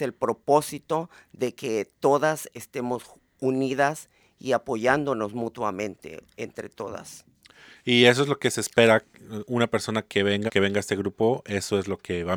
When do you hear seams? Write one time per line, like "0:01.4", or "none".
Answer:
0:10.5

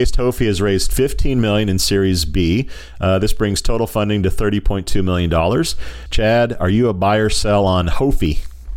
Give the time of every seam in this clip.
0:06.1

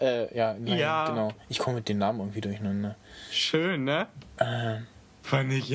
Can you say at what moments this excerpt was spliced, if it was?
none

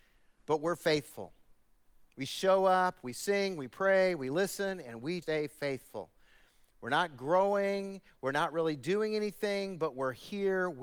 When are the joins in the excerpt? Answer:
0:05.2

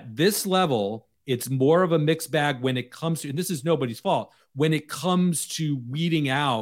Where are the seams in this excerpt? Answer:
none

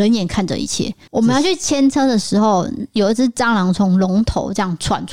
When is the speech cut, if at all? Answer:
0:01.1

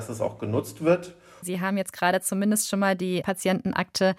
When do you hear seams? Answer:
0:01.4

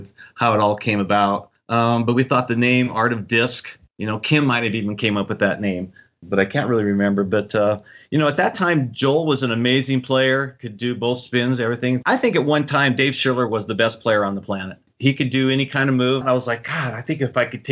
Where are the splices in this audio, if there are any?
0:12.0
0:16.2

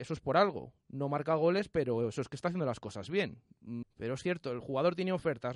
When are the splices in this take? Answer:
0:03.8

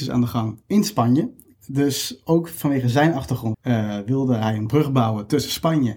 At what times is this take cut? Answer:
0:03.5

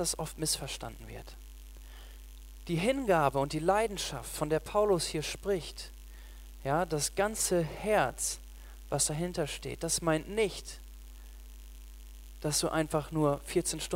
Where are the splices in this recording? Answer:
none

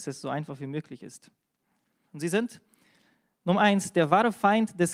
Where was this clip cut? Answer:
0:02.1

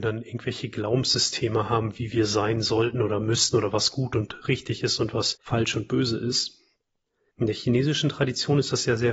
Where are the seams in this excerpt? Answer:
0:07.3

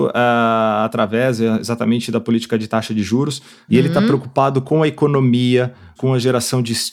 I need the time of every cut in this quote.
0:03.7
0:06.0

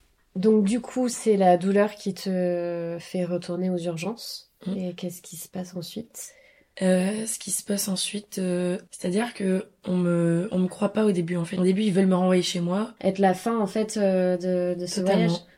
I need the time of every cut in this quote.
0:13.0

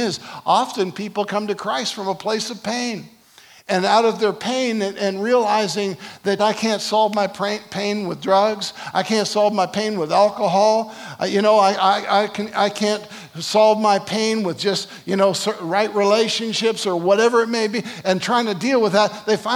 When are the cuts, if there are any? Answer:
0:06.4

